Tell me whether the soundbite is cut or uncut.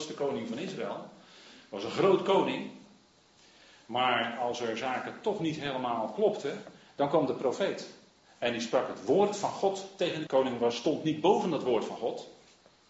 cut